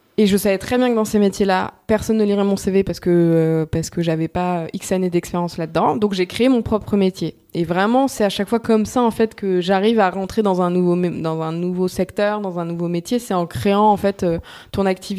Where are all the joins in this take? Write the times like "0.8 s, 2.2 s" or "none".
none